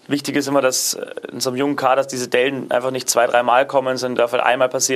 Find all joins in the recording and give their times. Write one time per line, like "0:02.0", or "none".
none

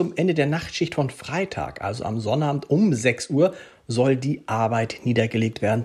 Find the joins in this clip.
none

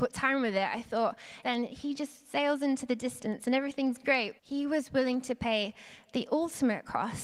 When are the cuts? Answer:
0:01.4
0:04.4

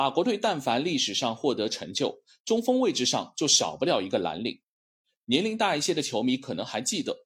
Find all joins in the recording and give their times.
none

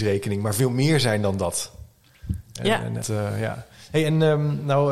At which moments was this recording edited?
0:03.0

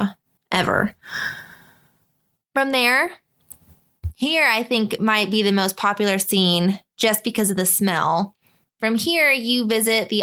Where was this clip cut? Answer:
none

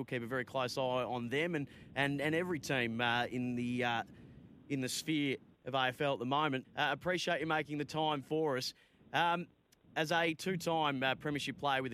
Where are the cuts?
0:06.6

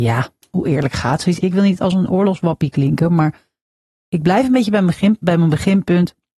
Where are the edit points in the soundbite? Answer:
0:01.4

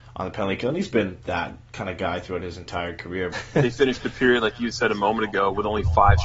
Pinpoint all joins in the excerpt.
0:03.3

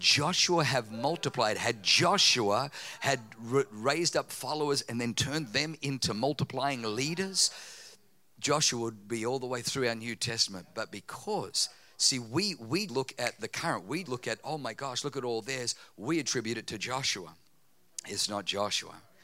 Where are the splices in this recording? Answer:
0:12.9
0:14.1

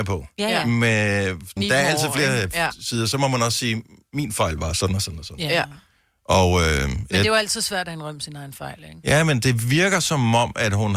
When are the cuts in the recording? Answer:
0:01.6

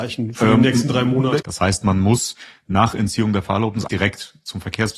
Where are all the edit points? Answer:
0:01.4
0:03.9

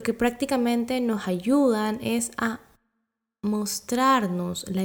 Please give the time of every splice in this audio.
none

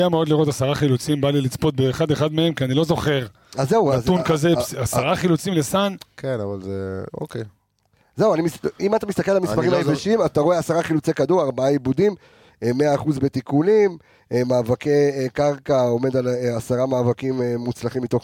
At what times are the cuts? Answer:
none

